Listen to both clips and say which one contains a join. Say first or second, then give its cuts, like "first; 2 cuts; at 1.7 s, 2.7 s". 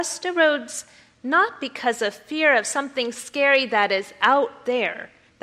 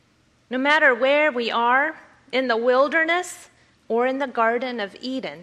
second; 1 cut; at 3.7 s